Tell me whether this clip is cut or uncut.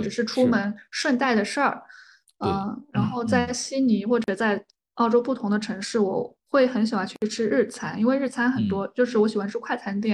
uncut